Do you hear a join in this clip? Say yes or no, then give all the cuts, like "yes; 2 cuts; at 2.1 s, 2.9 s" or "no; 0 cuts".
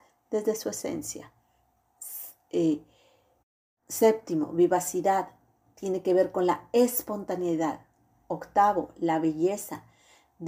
no; 0 cuts